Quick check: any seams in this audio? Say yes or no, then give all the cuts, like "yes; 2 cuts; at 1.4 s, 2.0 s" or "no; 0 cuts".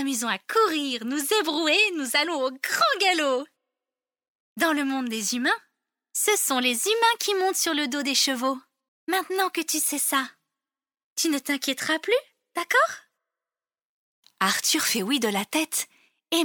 yes; 1 cut; at 8.9 s